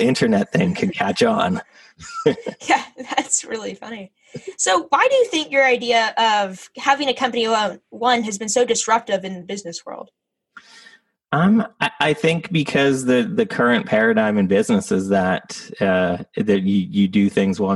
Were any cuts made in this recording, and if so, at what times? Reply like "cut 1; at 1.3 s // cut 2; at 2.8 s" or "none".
none